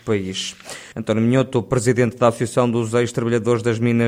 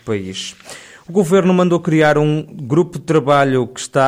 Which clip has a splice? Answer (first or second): first